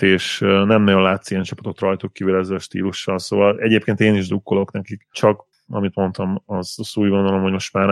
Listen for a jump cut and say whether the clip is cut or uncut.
cut